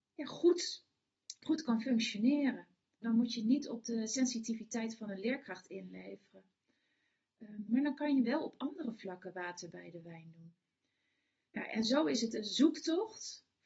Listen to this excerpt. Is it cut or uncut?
cut